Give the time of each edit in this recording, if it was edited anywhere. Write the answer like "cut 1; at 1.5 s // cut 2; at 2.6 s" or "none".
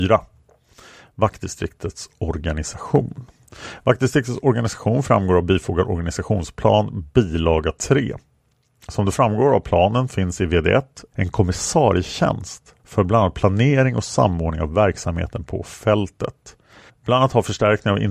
cut 1; at 11.1 s // cut 2; at 12.8 s // cut 3; at 16.9 s